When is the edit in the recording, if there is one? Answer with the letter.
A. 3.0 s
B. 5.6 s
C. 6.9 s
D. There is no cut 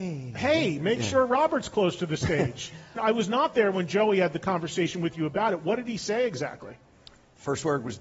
A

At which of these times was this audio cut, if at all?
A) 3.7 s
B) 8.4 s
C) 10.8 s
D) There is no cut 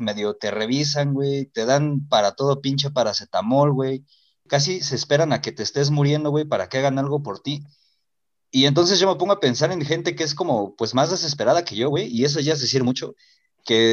D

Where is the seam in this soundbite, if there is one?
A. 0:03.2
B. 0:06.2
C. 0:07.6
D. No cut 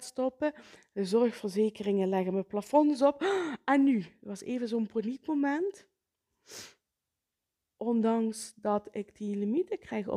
C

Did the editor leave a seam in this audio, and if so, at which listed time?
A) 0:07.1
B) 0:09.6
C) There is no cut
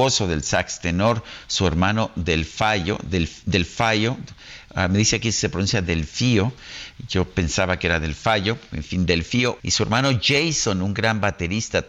B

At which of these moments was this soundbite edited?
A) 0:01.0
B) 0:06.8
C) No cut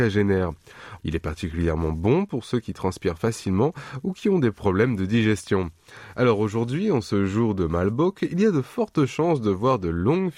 A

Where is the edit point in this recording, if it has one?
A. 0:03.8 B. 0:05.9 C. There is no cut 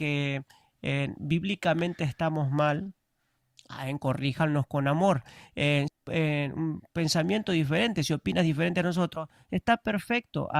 B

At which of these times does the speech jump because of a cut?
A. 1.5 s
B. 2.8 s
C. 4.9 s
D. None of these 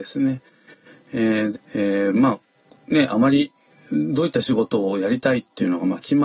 A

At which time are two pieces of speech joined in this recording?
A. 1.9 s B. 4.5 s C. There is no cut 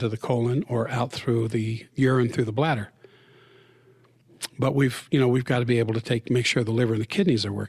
A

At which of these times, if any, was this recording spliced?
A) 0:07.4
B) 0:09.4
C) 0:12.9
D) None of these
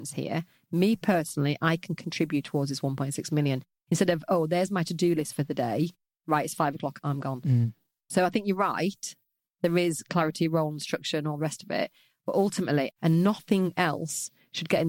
C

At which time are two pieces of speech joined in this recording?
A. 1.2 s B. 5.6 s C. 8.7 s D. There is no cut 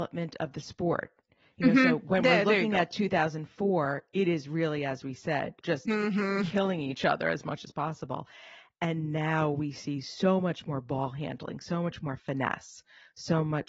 B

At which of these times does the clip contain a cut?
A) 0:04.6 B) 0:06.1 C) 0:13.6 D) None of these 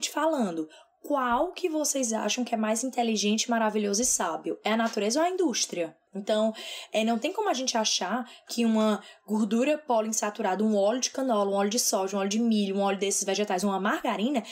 B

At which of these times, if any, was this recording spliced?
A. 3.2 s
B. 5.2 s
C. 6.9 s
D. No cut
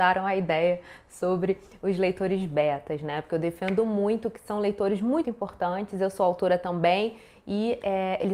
B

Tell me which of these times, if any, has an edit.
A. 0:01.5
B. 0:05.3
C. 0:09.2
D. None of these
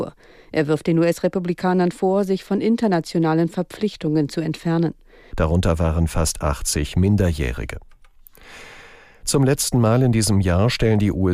B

